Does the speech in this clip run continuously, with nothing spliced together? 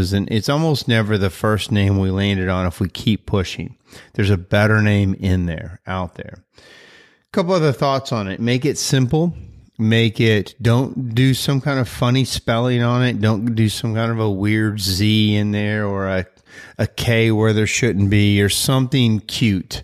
yes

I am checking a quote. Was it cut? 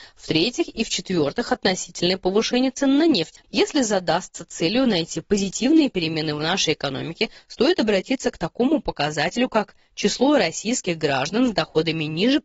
yes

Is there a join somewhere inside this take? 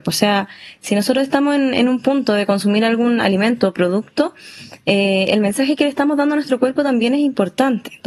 no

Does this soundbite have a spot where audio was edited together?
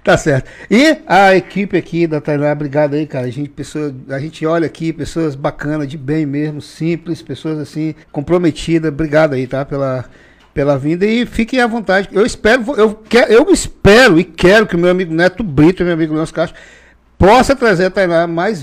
yes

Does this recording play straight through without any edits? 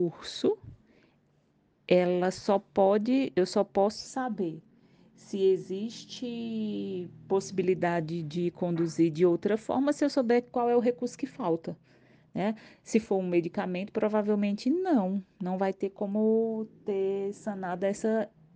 yes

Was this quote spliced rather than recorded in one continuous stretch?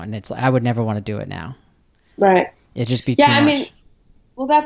no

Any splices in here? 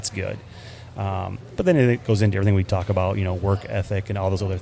no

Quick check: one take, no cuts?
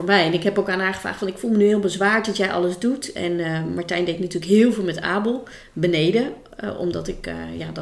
yes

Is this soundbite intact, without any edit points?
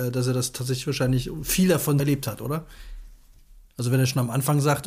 no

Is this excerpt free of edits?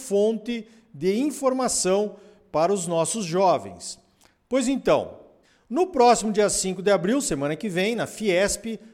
yes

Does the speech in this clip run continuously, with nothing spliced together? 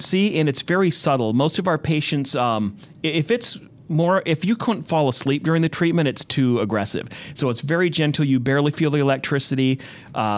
yes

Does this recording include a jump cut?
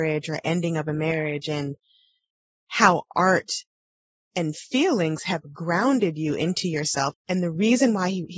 yes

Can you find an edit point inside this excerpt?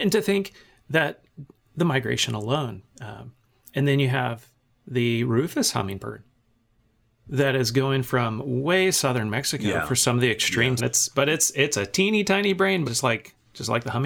yes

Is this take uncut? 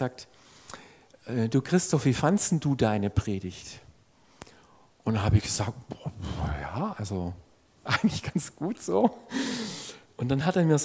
yes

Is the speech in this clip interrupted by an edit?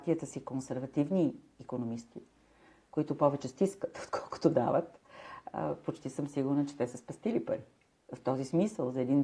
no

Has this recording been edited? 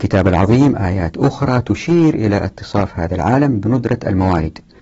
no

